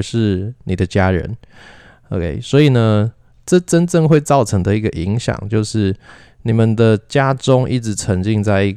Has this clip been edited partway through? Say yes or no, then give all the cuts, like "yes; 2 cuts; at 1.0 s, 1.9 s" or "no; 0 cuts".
no; 0 cuts